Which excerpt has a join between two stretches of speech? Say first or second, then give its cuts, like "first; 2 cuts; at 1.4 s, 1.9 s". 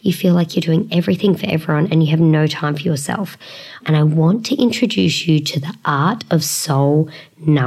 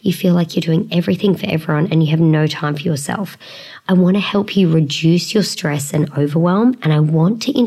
first; 1 cut; at 3.8 s